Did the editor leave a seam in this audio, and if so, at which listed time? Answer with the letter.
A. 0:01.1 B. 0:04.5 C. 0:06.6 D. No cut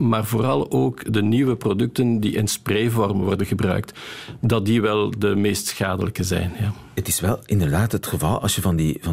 A